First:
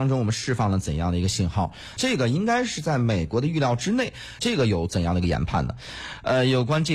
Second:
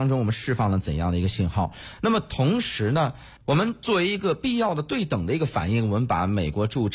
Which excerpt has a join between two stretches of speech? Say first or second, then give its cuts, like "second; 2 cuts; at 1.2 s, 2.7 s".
first; 2 cuts; at 2.0 s, 4.4 s